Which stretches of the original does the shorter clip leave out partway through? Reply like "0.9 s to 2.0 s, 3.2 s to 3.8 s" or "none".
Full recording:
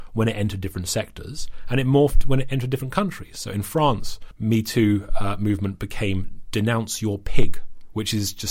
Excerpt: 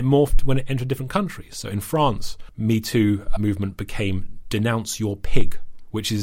5.2 s to 5.4 s